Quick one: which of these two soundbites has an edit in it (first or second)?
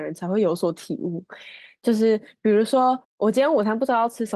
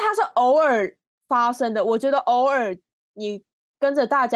first